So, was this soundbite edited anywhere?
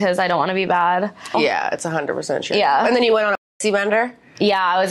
yes; 1 cut; at 1.3 s

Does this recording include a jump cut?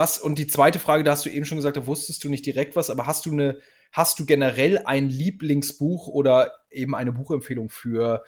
no; 0 cuts

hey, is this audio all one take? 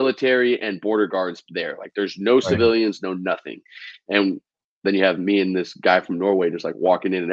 yes; 0 cuts

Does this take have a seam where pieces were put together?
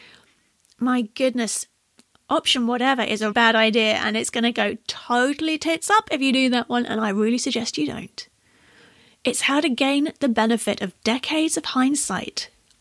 yes; 1 cut; at 3.3 s

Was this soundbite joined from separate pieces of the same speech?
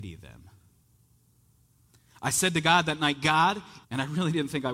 yes; 1 cut; at 3.8 s

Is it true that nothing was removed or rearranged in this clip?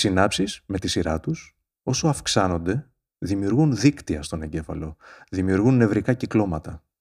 yes; 0 cuts

